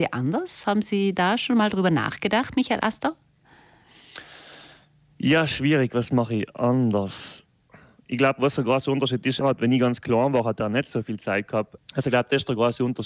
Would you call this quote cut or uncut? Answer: cut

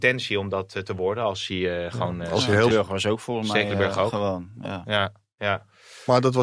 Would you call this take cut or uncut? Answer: cut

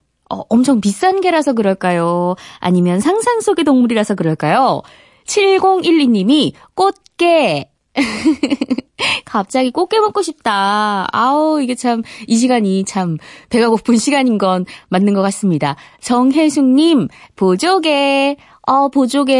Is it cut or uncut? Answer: uncut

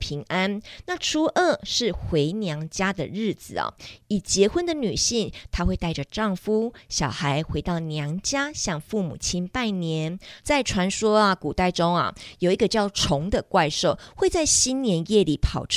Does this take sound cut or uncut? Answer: cut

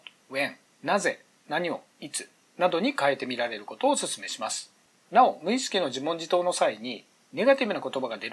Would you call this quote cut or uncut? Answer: uncut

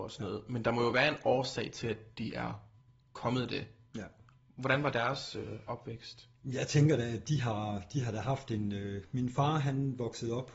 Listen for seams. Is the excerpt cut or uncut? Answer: uncut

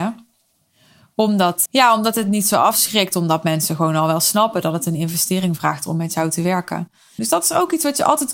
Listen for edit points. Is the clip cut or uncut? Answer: cut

